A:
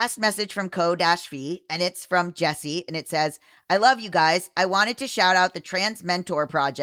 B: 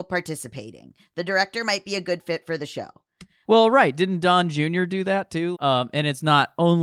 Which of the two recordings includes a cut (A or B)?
B